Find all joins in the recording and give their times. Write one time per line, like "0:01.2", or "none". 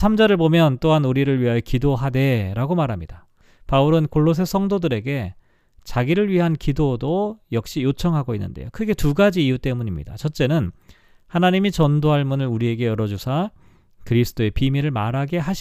none